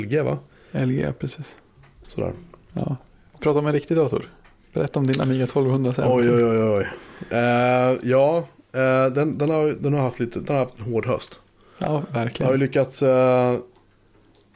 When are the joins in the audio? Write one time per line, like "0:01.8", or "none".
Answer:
0:02.0